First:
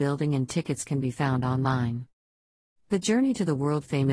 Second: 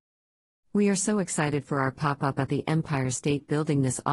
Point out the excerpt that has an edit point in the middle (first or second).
first